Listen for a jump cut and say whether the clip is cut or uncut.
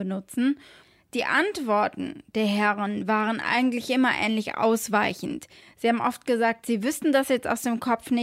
uncut